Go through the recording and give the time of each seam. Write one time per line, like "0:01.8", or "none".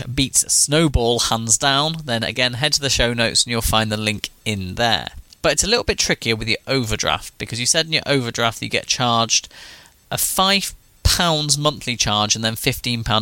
0:05.4
0:09.9